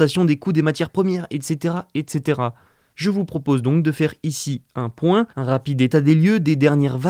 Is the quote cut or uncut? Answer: cut